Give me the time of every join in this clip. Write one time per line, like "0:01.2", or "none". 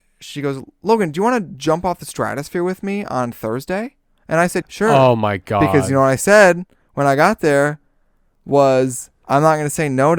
0:04.6